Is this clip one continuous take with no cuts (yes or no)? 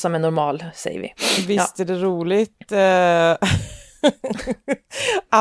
yes